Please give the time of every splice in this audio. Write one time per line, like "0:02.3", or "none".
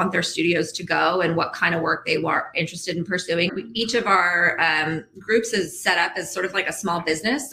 0:03.5